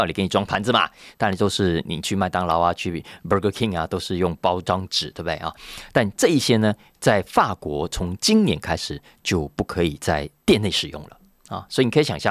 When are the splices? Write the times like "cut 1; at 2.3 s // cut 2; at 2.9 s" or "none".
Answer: none